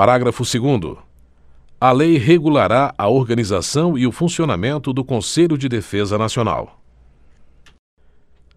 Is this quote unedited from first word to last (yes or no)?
yes